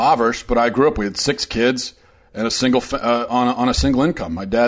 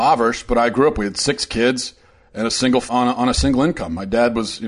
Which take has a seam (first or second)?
second